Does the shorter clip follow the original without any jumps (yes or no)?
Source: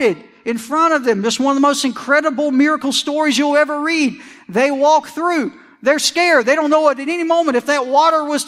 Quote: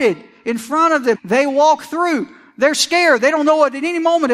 no